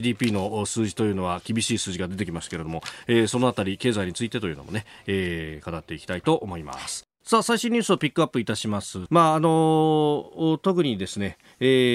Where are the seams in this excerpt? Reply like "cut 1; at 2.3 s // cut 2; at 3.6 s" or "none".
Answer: cut 1; at 7.1 s // cut 2; at 9.1 s